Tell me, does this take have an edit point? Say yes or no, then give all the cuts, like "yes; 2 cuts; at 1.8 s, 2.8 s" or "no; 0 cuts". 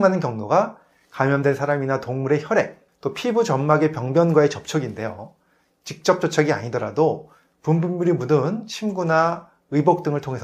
yes; 1 cut; at 2.9 s